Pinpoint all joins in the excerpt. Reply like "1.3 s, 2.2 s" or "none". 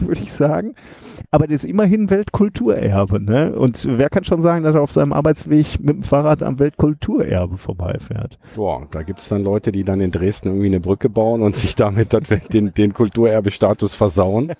none